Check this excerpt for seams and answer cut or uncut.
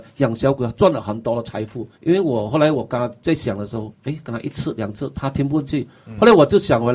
cut